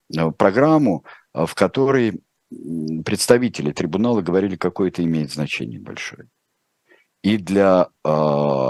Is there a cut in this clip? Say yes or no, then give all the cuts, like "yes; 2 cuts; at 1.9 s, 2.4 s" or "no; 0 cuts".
no; 0 cuts